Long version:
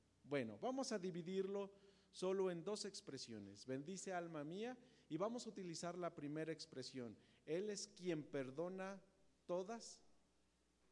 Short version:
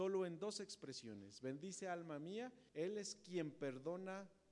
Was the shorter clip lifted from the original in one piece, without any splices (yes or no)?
no